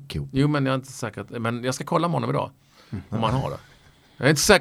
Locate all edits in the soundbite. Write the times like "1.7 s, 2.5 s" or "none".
none